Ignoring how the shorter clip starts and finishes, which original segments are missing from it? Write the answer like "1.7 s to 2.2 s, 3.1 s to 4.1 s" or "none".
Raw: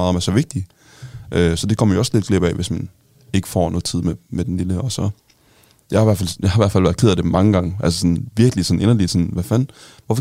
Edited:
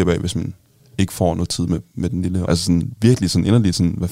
4.8 s to 7.8 s